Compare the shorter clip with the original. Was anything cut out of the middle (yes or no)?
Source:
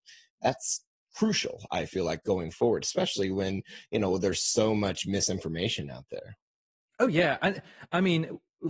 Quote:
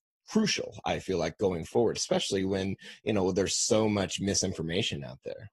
no